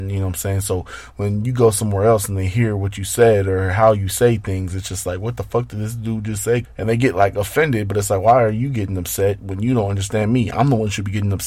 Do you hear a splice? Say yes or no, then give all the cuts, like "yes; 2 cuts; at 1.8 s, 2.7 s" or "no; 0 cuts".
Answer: yes; 1 cut; at 6.6 s